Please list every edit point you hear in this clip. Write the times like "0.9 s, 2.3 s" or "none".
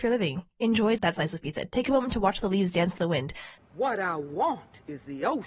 1.0 s, 3.6 s